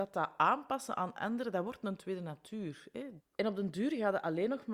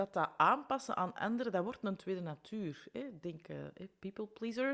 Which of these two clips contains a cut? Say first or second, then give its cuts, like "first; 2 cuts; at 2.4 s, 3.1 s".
first; 1 cut; at 3.2 s